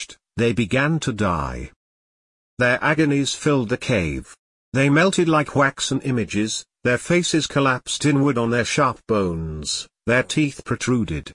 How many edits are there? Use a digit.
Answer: 0